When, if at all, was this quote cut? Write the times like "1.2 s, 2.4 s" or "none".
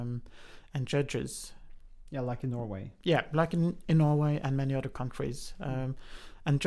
none